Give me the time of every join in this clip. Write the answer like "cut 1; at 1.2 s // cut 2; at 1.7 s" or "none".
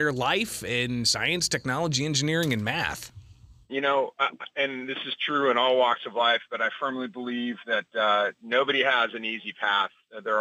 cut 1; at 3.7 s